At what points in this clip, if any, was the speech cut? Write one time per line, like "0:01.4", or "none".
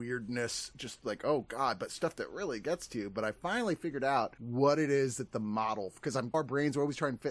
0:06.3